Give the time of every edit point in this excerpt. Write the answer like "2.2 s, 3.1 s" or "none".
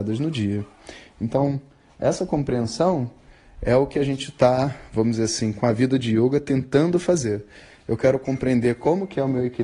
none